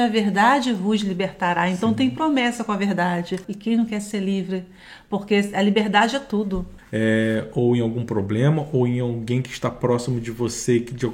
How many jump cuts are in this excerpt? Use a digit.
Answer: 2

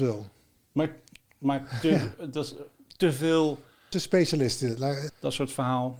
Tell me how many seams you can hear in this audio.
2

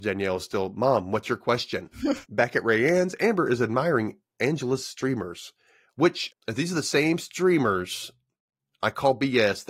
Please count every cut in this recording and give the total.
2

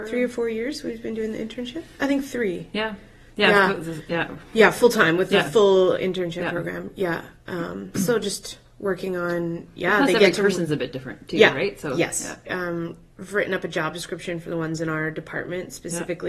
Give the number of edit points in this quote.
1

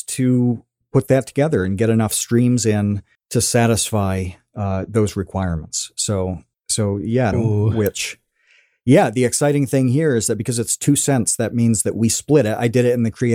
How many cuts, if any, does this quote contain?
1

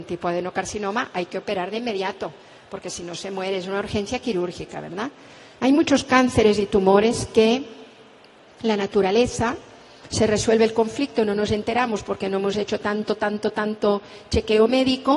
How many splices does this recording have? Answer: 1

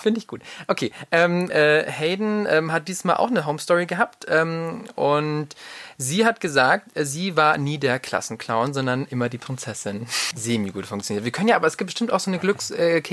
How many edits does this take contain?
2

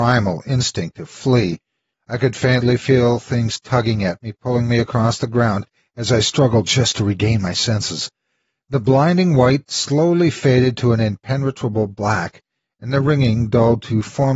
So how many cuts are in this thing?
1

